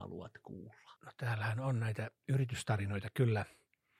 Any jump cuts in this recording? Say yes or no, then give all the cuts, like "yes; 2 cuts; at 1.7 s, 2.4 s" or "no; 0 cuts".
yes; 1 cut; at 1.0 s